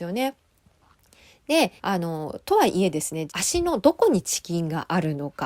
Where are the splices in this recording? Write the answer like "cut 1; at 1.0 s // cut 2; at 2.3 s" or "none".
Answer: cut 1; at 1.8 s // cut 2; at 3.3 s